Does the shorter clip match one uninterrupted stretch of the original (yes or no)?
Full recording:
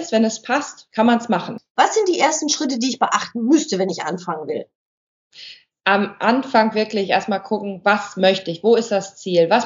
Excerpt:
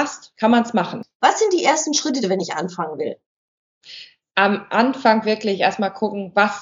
no